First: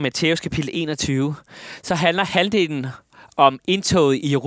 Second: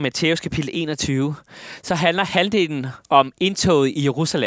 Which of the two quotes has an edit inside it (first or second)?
second